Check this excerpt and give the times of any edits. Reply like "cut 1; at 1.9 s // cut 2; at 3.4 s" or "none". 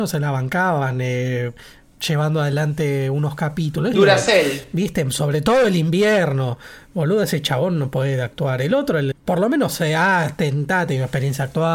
cut 1; at 3.9 s // cut 2; at 9.1 s